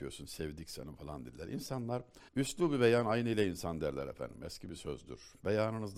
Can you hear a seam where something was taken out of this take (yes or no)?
yes